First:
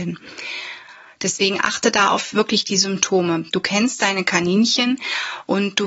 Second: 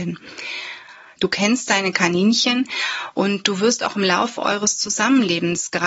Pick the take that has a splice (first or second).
second